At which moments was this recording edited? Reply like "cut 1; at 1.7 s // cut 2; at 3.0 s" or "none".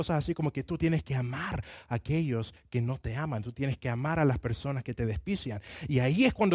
none

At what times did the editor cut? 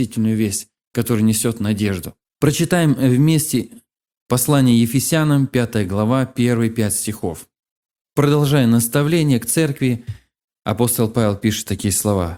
cut 1; at 2.3 s

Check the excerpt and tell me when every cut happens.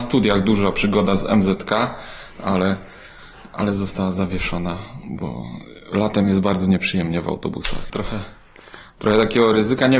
cut 1; at 7.9 s

